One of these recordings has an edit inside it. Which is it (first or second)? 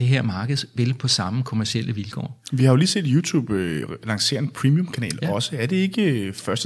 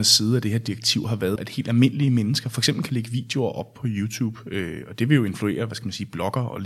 second